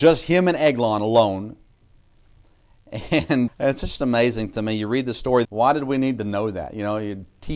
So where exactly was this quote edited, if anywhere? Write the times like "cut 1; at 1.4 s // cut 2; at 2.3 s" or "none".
cut 1; at 3.5 s // cut 2; at 5.4 s